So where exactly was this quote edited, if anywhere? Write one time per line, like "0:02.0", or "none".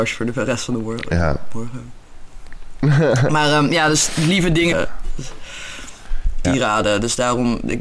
0:04.7
0:06.4